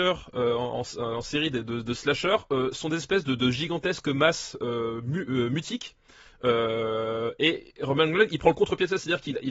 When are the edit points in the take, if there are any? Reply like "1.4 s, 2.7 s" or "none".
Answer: none